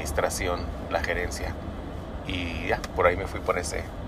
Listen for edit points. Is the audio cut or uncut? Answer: uncut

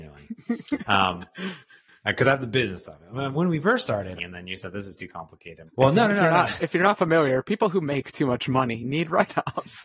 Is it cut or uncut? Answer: cut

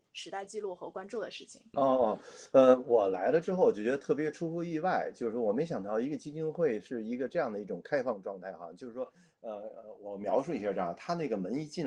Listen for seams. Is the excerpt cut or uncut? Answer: cut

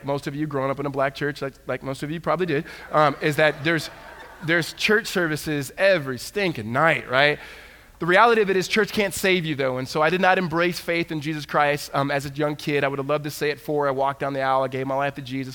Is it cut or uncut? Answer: uncut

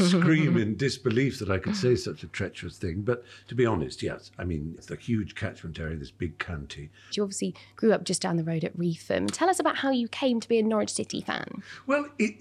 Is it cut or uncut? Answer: cut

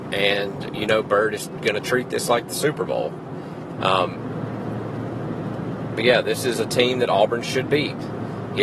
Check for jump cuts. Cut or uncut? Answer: cut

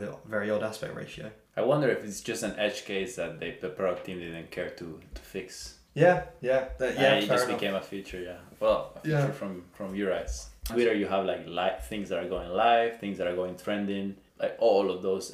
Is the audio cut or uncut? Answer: cut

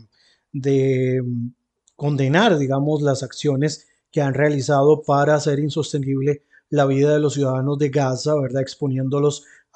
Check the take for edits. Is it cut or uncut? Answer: uncut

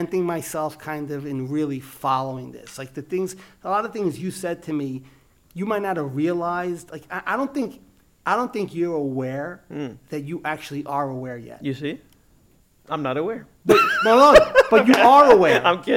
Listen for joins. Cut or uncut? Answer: uncut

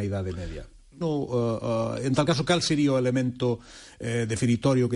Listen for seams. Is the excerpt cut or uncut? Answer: cut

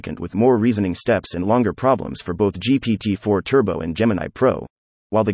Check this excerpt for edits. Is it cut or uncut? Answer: uncut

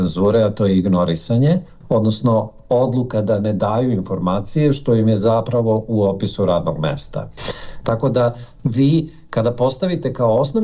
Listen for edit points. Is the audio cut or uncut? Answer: uncut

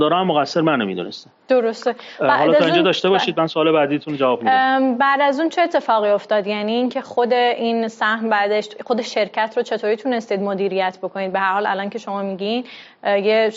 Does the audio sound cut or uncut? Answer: uncut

